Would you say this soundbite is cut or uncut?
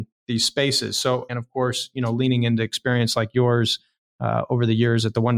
cut